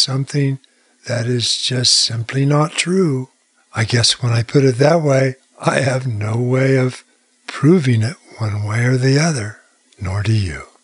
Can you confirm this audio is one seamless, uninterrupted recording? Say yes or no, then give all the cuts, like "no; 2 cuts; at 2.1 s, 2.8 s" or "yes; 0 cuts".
yes; 0 cuts